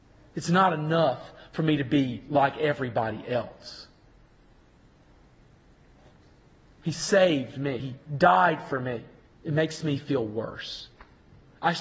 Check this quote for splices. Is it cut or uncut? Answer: cut